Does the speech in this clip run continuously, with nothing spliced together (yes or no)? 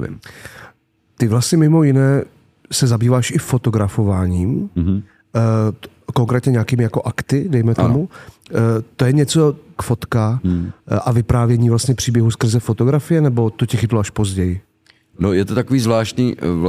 no